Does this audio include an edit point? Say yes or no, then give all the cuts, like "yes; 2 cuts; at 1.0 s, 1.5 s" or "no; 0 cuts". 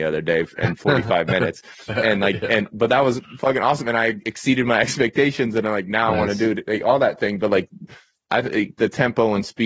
no; 0 cuts